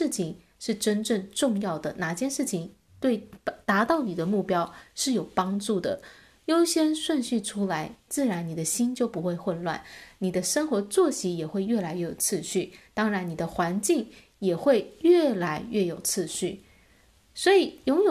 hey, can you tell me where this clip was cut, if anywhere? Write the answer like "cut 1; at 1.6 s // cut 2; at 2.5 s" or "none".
none